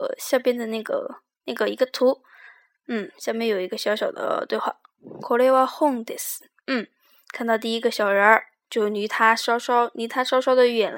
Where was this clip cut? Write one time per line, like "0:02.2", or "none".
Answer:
0:08.6